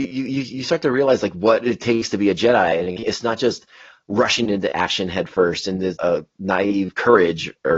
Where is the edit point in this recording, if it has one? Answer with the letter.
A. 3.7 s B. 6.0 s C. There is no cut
B